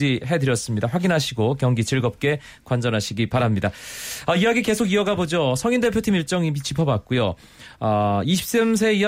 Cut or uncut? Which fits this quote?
uncut